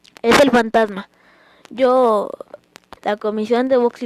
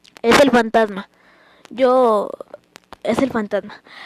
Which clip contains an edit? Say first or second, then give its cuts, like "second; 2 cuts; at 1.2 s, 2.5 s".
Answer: first; 1 cut; at 3.0 s